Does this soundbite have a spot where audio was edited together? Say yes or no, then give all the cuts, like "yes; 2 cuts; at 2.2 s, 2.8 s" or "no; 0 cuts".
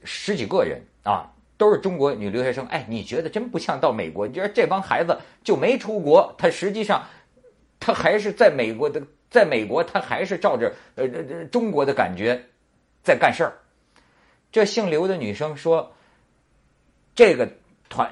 no; 0 cuts